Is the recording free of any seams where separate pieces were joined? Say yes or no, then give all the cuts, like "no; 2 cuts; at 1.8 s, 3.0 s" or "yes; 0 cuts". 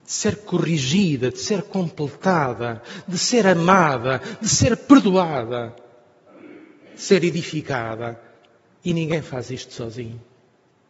yes; 0 cuts